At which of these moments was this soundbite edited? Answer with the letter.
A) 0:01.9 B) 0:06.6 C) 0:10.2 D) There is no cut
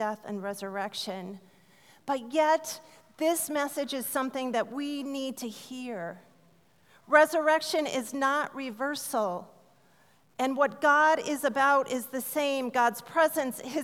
D